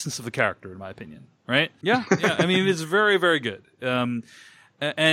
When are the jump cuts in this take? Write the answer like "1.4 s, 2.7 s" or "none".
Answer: 1.8 s